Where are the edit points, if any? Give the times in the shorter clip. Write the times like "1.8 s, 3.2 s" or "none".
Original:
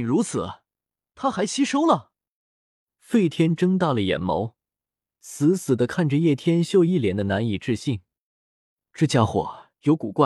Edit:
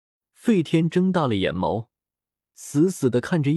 none